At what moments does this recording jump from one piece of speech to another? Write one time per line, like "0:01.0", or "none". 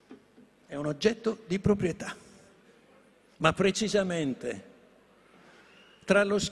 none